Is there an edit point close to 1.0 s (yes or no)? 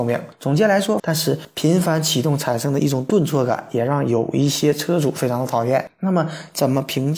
yes